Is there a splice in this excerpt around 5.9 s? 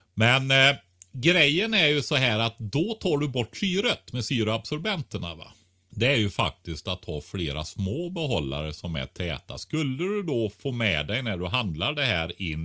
yes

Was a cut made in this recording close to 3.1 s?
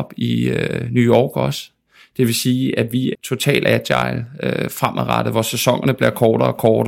yes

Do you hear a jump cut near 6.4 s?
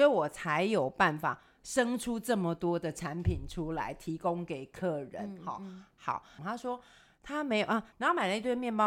yes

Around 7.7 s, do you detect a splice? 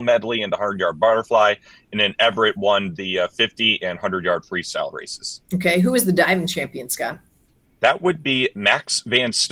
no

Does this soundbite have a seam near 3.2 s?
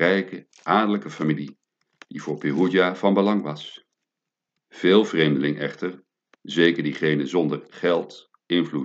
no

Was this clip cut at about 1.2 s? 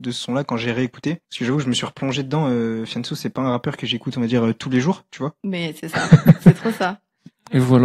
yes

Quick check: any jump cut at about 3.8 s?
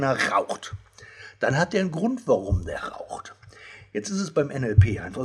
no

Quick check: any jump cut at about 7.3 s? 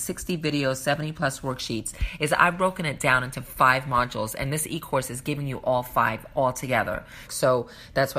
yes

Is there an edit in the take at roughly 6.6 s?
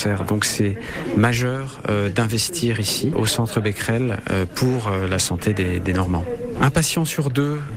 yes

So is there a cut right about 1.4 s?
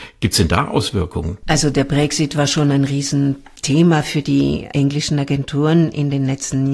yes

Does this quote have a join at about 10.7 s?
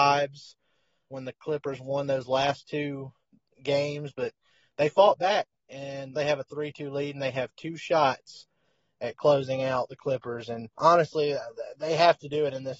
yes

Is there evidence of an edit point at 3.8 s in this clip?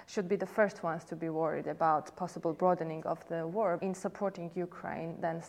yes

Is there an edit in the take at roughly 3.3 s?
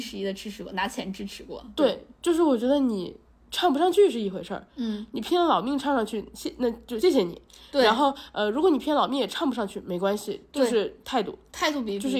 no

